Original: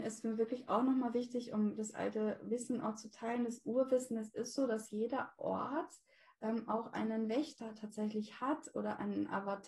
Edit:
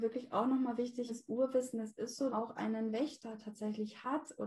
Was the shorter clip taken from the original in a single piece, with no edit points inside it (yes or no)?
no